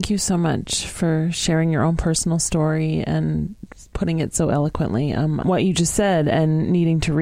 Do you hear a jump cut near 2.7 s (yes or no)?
no